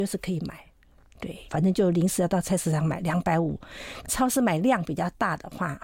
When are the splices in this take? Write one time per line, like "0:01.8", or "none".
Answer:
0:01.5
0:04.0